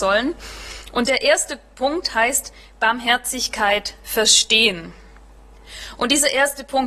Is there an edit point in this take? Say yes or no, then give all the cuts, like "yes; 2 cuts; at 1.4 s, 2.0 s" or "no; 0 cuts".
no; 0 cuts